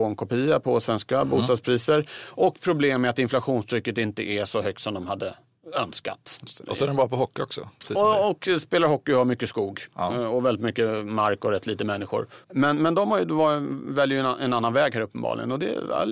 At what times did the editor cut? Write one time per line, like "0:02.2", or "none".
0:12.4